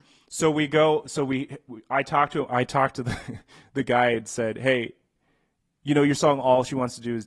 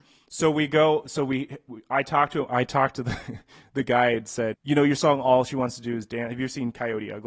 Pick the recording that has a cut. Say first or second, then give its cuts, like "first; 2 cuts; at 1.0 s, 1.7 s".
second; 1 cut; at 4.5 s